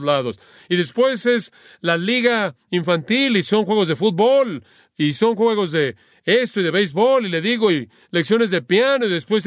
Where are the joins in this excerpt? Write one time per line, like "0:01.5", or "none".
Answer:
none